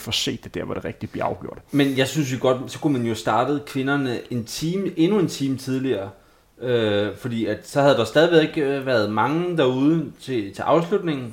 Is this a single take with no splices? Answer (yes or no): yes